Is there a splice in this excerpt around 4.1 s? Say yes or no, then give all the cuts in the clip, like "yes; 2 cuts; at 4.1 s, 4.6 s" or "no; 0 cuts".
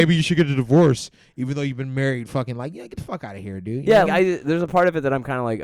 yes; 1 cut; at 4.1 s